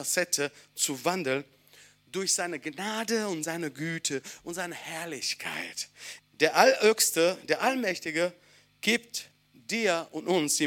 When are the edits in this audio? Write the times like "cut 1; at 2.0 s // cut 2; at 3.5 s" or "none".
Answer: cut 1; at 6.2 s